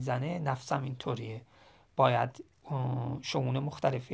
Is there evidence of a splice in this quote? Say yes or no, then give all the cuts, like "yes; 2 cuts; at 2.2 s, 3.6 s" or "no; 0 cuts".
no; 0 cuts